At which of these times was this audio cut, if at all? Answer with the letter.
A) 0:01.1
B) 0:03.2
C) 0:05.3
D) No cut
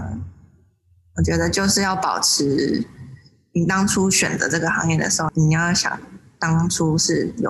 C